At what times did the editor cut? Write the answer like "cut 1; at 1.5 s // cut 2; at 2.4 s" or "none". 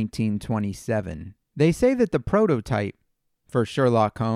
cut 1; at 1.4 s